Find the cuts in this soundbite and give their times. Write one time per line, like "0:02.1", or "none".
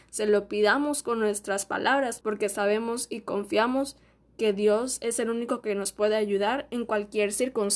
0:02.2